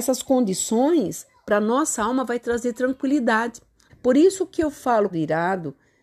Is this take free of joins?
no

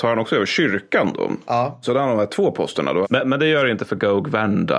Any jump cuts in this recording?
yes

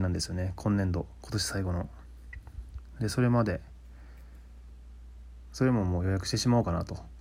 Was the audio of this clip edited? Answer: no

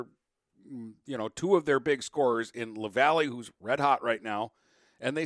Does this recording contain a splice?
no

